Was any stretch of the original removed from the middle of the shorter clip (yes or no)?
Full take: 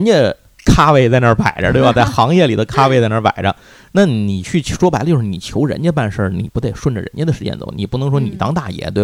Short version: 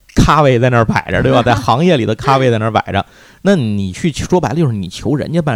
no